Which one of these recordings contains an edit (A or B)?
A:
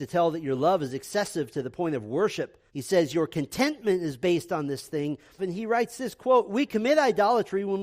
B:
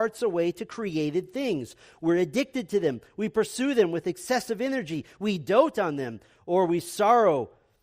A